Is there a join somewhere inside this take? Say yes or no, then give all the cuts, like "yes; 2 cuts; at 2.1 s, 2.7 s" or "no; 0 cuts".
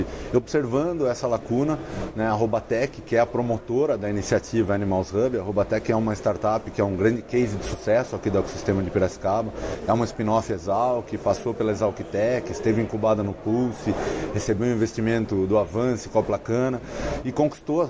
no; 0 cuts